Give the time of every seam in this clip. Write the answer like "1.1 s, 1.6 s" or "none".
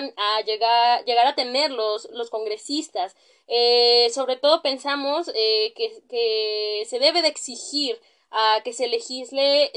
2.1 s